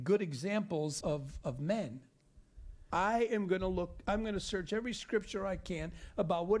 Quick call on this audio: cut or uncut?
cut